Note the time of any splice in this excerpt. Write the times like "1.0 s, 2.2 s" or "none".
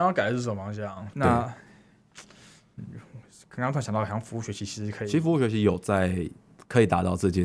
1.1 s